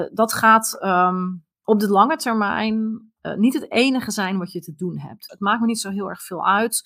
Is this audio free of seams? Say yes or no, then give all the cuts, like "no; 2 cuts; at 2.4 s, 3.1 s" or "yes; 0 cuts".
no; 2 cuts; at 1.5 s, 5.3 s